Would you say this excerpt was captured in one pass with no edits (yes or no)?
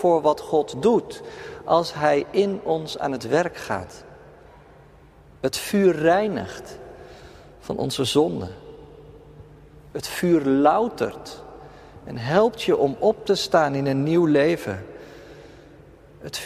yes